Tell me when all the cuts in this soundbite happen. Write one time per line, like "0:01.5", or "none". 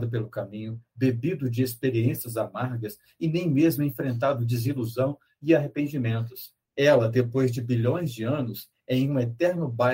0:06.6
0:08.7